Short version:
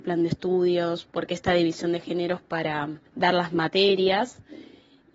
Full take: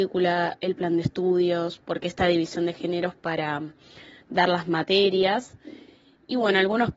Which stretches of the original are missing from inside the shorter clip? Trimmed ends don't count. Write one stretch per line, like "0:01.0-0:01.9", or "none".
0:03.8-0:04.2